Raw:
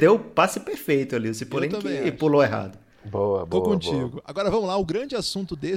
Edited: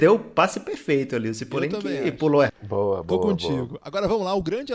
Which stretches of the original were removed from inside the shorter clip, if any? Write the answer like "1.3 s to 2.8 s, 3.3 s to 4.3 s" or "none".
2.5 s to 2.9 s